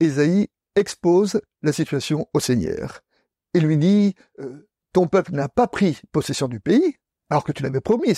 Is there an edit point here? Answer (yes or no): no